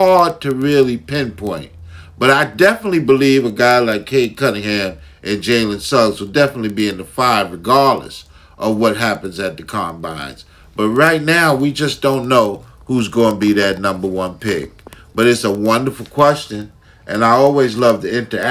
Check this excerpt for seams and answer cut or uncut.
uncut